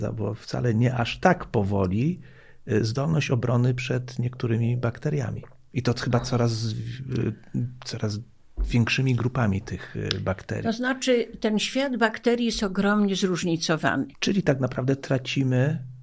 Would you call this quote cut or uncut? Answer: cut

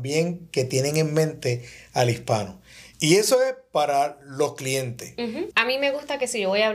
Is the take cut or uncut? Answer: cut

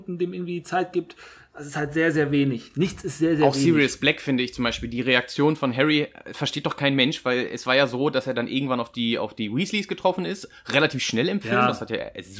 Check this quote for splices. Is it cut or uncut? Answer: uncut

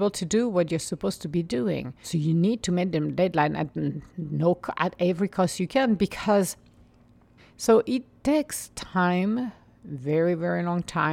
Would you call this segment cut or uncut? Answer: cut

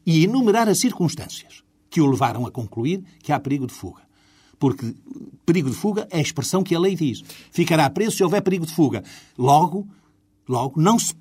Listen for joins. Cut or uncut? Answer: uncut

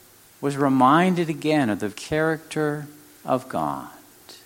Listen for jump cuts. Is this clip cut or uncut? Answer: cut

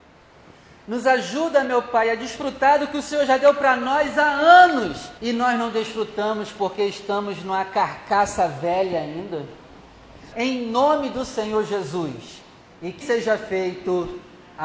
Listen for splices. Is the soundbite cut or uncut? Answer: cut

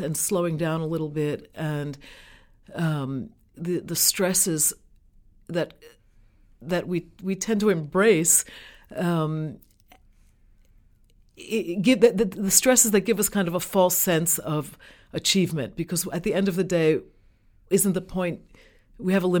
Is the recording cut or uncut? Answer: cut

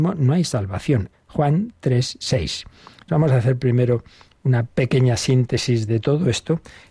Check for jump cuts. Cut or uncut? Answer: cut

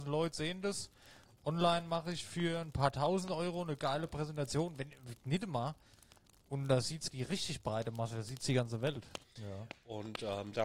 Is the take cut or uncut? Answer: cut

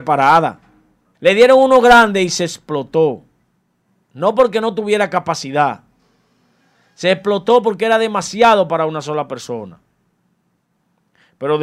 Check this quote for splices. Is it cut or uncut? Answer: cut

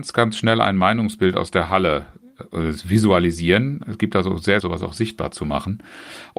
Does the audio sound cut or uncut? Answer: cut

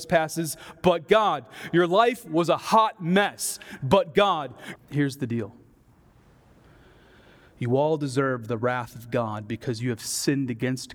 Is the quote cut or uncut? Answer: cut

